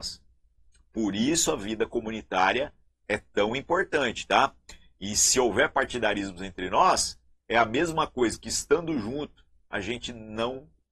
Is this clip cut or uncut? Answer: uncut